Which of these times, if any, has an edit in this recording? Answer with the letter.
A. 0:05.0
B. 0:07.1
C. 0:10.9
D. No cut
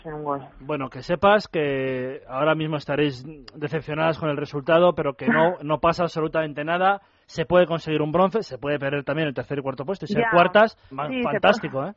C